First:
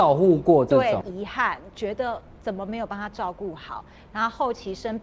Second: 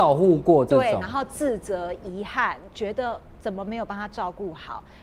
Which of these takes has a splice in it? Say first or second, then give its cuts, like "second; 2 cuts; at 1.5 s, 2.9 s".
first; 1 cut; at 1.0 s